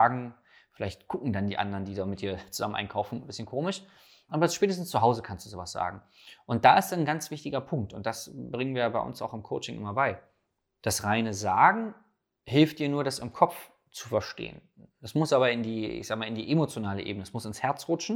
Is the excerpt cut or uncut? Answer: uncut